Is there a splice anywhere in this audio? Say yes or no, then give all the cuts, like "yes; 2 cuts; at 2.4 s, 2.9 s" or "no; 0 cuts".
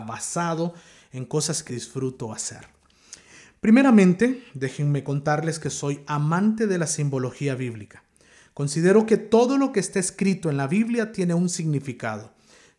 yes; 1 cut; at 1.7 s